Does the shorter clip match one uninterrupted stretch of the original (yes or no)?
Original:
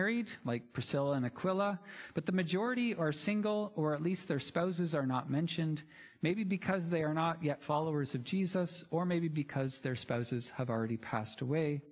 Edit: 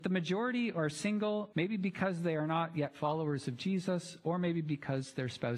no